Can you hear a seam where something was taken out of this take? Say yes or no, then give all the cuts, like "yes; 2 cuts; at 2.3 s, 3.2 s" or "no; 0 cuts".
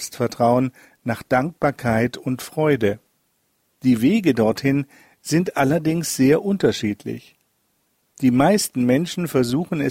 no; 0 cuts